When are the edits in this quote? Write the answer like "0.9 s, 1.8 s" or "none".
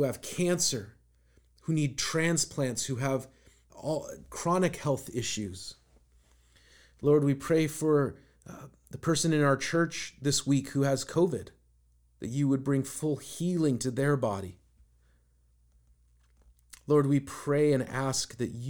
3.7 s